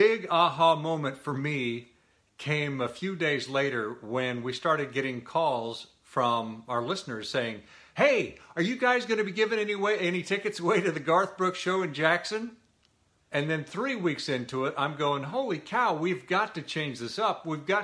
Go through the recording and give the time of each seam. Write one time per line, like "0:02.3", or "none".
0:13.2